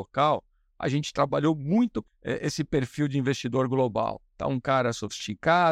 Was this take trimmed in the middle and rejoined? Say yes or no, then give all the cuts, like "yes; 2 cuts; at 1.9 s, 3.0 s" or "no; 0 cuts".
yes; 1 cut; at 2.1 s